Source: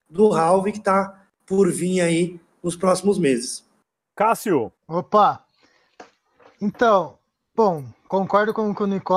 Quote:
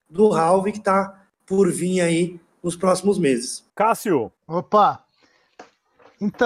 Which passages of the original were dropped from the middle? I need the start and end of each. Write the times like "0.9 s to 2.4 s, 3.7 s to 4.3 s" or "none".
3.7 s to 4.1 s

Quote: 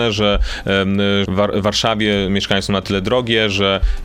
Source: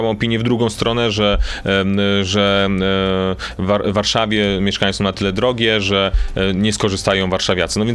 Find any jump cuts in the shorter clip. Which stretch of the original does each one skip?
2.2 s to 3.6 s

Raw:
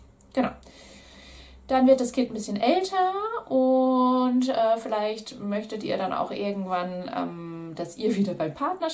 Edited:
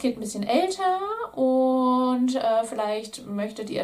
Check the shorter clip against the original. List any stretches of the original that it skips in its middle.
none

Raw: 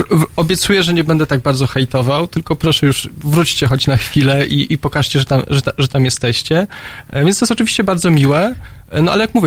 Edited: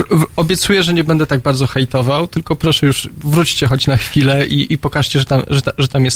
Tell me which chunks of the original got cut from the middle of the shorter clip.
none

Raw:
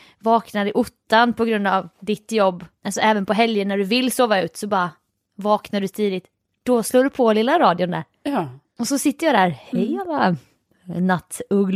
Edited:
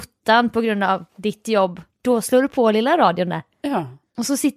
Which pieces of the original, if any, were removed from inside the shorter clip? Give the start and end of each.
2.8 s to 6.5 s

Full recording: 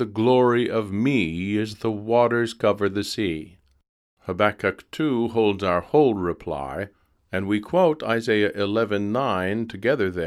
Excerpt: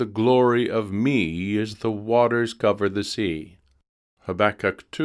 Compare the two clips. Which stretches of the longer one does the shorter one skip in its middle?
none

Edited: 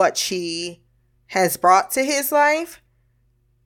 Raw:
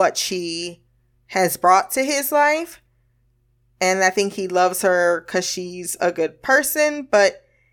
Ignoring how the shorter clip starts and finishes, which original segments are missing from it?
none

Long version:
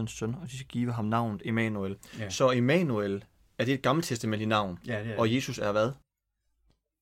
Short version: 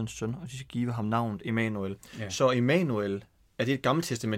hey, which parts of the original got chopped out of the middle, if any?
none

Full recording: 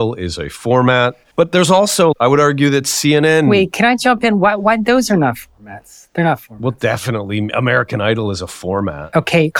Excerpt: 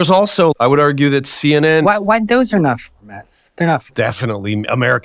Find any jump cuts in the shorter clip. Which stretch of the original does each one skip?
3.4 s to 4.4 s, 6.5 s to 6.7 s

